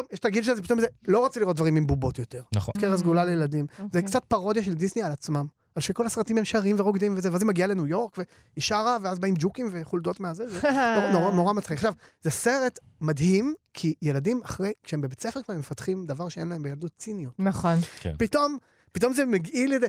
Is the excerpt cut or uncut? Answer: cut